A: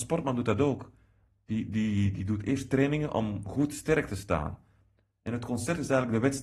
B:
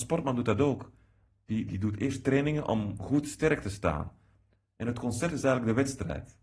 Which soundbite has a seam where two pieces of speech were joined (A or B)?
B